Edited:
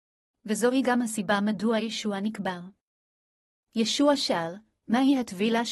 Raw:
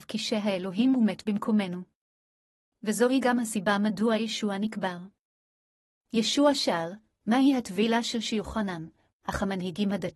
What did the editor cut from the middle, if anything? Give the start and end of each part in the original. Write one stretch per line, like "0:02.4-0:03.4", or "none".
none